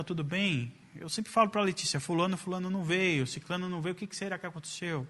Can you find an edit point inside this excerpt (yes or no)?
no